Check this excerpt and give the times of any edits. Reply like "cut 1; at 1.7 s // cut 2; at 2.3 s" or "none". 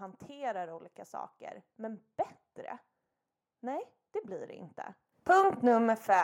cut 1; at 5.1 s